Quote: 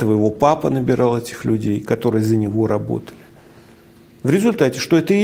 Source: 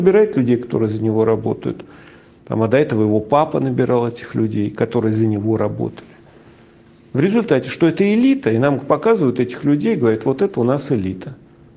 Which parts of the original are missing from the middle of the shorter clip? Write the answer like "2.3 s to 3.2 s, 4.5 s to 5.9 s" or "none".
none